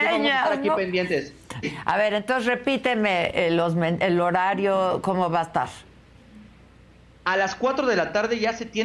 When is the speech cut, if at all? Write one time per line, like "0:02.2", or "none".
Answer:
0:01.6